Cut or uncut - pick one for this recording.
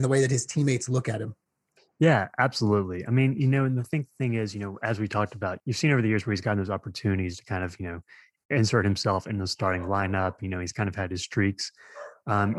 uncut